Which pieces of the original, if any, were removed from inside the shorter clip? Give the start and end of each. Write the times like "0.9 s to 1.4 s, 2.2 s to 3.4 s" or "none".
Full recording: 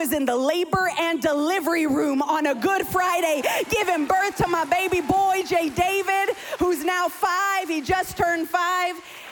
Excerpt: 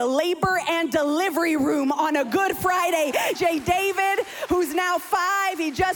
3.7 s to 5.5 s